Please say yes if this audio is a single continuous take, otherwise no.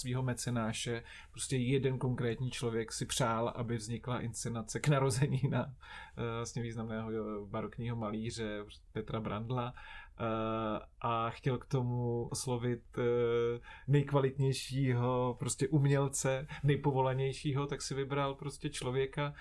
no